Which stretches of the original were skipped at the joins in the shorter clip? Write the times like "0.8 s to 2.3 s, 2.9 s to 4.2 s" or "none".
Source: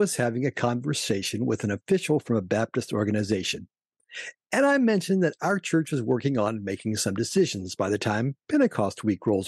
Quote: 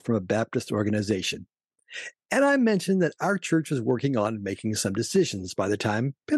none